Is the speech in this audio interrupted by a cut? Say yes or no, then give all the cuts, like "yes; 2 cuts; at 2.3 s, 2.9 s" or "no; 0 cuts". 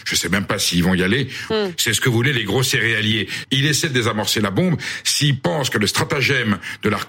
yes; 2 cuts; at 1.5 s, 3.4 s